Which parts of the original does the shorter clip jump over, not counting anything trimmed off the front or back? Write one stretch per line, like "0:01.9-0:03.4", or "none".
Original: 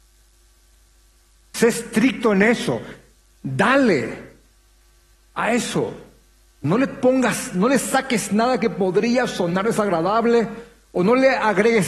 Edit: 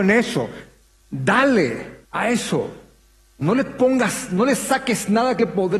0:04.3-0:05.3